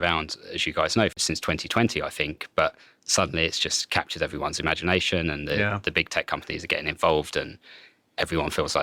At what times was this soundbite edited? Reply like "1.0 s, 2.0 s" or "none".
none

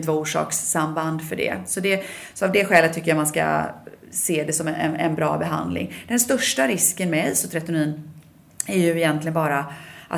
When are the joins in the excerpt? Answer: none

